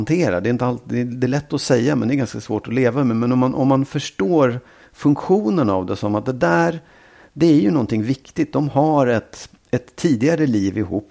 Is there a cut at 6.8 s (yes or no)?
no